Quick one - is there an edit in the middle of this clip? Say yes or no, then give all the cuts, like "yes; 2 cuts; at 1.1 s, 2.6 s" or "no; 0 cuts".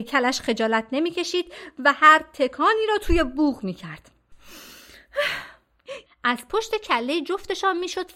yes; 1 cut; at 6.1 s